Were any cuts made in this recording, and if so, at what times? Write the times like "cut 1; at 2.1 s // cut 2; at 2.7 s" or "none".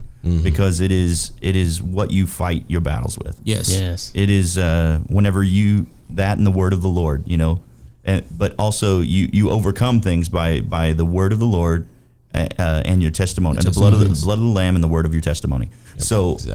cut 1; at 13.6 s